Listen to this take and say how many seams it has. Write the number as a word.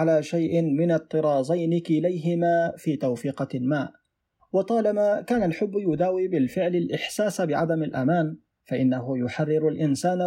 zero